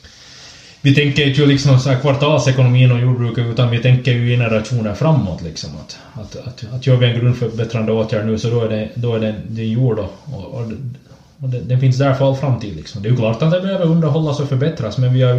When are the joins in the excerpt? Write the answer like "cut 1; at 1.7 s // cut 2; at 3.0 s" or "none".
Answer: none